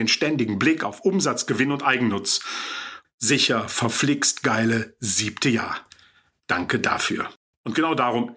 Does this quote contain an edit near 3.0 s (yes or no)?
yes